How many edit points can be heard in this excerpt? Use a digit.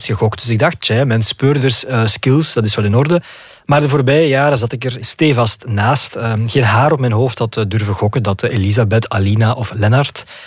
1